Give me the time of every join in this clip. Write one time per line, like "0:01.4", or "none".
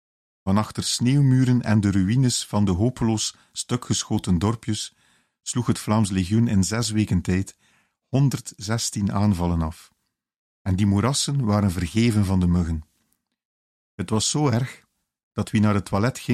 0:10.5